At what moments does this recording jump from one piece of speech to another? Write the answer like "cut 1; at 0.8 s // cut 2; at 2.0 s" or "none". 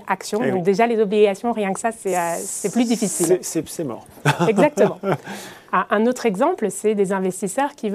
none